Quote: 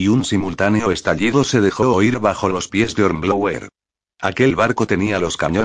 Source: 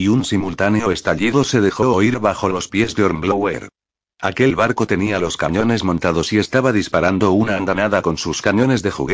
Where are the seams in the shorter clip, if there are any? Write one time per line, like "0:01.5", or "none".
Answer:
none